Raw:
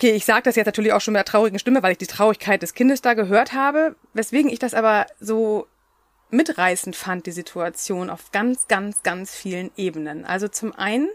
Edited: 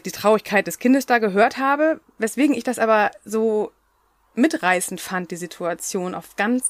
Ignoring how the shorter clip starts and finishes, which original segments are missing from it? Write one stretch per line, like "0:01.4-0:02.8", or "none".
none